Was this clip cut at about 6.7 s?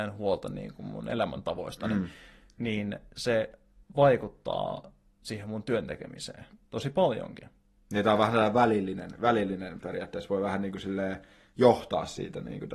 no; 0 cuts

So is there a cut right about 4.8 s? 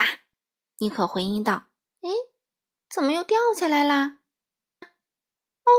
yes; 2 cuts; at 1.8 s, 4.8 s

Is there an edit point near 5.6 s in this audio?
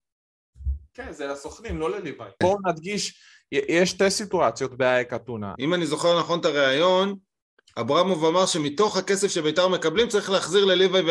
yes; 2 cuts; at 2.4 s, 5.6 s

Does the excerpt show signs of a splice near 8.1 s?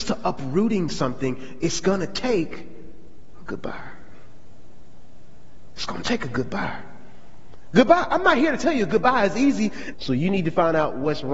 no; 1 cut; at 9.9 s

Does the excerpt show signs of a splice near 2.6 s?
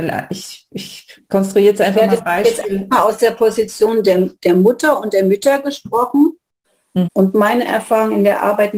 no; 1 cut; at 7.0 s

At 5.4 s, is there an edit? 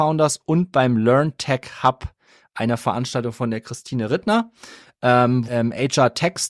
yes; 1 cut; at 5.4 s

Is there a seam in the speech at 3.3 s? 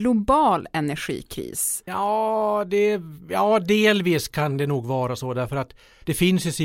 no; 1 cut; at 1.9 s

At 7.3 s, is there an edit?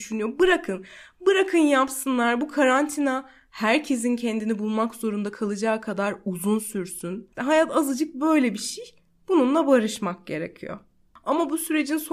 yes; 1 cut; at 7.3 s

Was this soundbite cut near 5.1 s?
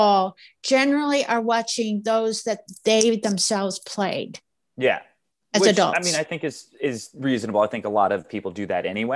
no; 0 cuts

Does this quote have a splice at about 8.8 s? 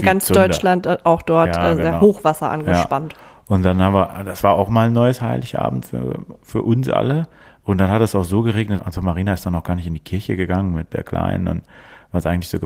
yes; 1 cut; at 8.8 s

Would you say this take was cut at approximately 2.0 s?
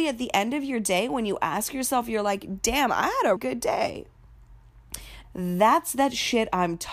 no; 2 cuts; at 3.4 s, 5.2 s

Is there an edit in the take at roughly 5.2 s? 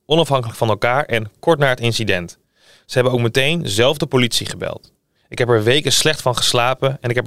yes; 1 cut; at 5.2 s

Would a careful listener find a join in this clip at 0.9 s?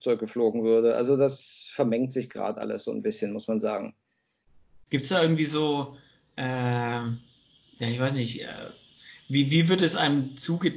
no; 1 cut; at 4.9 s

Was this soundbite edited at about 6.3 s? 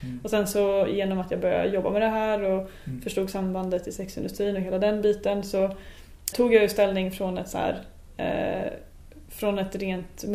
yes; 1 cut; at 6.3 s

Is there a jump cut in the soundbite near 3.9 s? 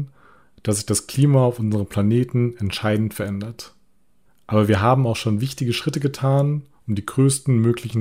no; 0 cuts

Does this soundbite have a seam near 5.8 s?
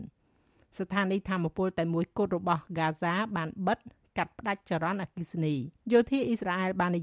yes; 1 cut; at 5.8 s

